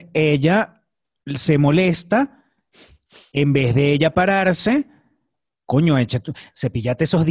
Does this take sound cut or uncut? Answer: uncut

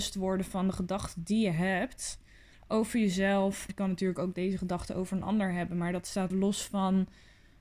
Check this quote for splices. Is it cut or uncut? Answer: cut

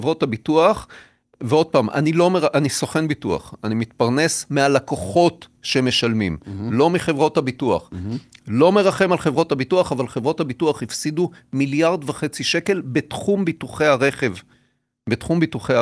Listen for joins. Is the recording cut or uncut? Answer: uncut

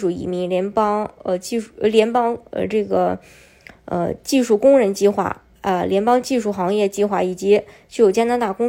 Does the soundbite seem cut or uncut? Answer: uncut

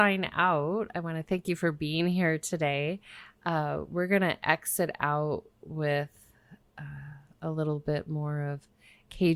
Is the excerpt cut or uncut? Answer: uncut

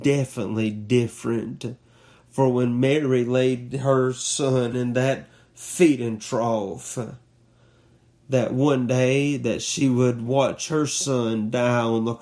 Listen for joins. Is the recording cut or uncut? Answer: cut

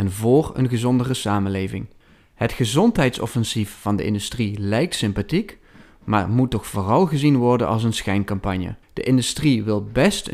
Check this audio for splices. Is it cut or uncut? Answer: cut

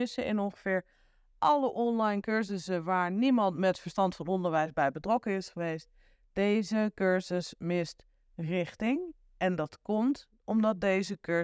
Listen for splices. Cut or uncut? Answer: uncut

